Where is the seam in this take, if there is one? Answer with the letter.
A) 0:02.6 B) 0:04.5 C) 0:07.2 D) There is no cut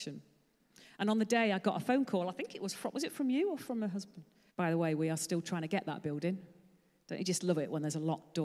B